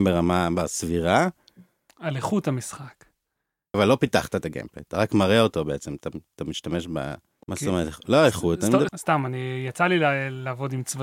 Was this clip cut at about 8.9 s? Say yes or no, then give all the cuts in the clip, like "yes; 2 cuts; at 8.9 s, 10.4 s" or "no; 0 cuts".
yes; 3 cuts; at 3.7 s, 7.4 s, 8.9 s